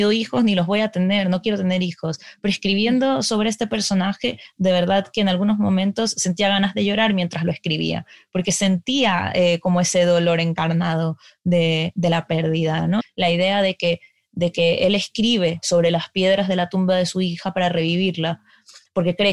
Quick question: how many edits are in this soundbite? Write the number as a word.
one